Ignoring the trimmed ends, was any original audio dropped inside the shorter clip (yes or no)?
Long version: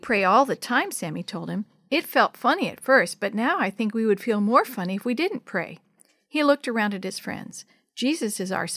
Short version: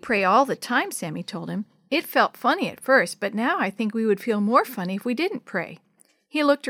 no